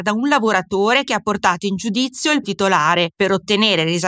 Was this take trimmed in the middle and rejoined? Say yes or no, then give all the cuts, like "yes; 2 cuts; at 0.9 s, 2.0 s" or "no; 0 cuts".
yes; 1 cut; at 2.4 s